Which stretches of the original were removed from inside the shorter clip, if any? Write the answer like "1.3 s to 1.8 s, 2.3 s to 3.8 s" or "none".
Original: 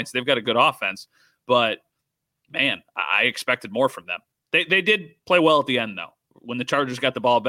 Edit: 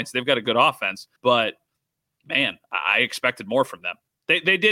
1.2 s to 1.4 s